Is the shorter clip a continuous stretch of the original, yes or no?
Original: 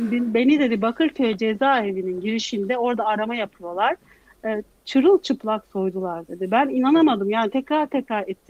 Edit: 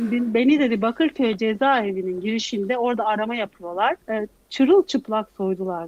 no